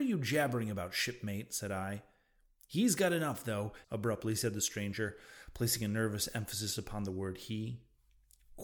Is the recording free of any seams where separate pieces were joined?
no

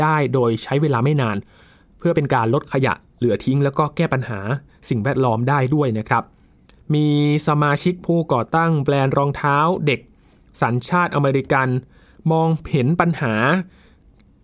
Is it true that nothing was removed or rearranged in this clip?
yes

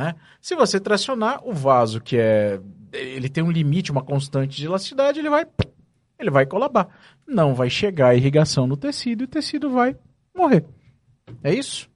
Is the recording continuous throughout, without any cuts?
yes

